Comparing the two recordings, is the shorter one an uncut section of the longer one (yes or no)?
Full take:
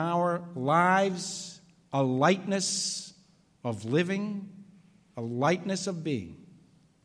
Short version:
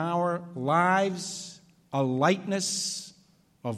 yes